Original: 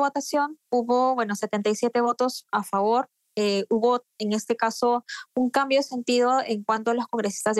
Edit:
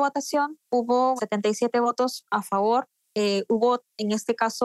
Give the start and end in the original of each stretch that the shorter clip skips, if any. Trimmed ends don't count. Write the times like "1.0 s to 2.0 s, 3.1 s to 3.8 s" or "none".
1.2 s to 1.4 s